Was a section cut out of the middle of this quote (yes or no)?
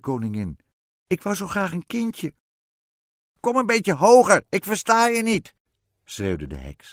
no